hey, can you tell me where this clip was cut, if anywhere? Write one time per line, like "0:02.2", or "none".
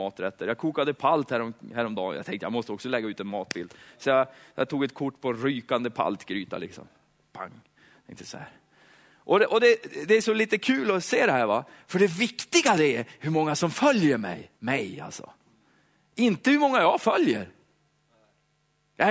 0:14.6